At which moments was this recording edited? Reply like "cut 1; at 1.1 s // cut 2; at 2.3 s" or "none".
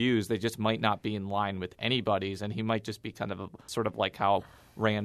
cut 1; at 3.7 s